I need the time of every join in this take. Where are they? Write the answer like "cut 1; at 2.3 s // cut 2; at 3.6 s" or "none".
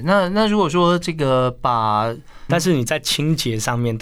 cut 1; at 2.5 s